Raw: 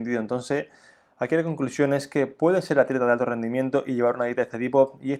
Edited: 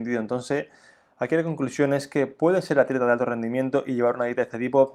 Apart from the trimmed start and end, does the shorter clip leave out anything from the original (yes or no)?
no